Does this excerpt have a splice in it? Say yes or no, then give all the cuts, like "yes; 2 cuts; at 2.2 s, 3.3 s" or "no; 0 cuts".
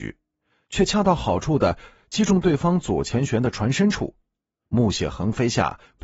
no; 0 cuts